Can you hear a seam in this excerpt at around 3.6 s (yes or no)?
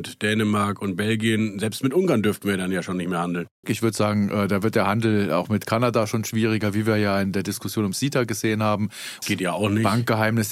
yes